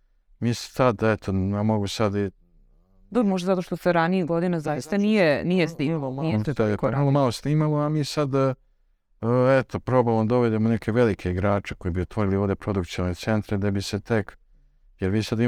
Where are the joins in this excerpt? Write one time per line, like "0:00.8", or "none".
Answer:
none